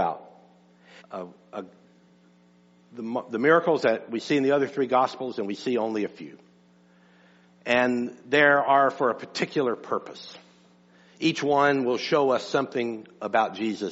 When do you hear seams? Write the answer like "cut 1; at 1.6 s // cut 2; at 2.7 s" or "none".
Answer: cut 1; at 1.0 s